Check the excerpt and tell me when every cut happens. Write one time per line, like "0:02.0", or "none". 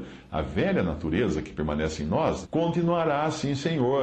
0:02.4